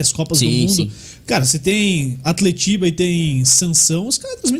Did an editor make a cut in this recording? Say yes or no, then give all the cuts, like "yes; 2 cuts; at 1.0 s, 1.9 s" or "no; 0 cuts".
no; 0 cuts